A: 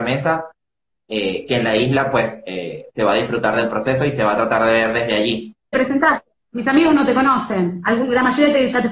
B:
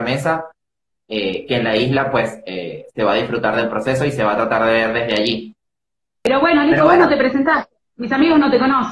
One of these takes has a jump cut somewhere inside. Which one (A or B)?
A